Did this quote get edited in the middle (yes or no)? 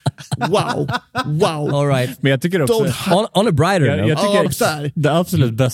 yes